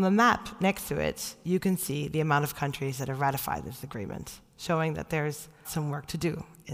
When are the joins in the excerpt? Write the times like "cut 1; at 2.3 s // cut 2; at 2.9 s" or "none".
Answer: cut 1; at 5.6 s